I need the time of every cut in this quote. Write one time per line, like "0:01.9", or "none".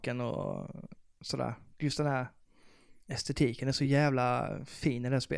0:01.7
0:03.0